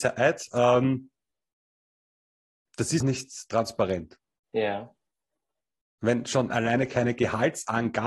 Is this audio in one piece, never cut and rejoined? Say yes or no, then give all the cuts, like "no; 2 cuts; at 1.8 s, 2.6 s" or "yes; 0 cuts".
no; 1 cut; at 3.0 s